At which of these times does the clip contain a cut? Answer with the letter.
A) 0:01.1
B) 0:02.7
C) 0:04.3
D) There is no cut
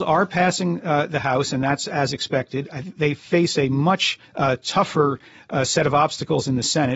C